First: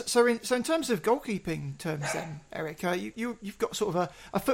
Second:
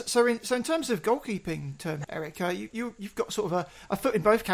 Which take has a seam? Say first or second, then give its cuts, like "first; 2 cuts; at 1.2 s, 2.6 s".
second; 1 cut; at 2.0 s